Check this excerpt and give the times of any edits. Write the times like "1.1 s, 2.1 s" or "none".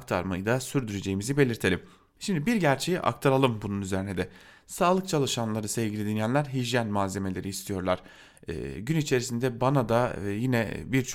none